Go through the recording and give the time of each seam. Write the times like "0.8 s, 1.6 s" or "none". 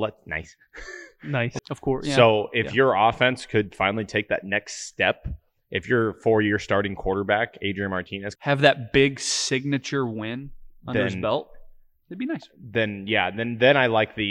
1.6 s, 8.4 s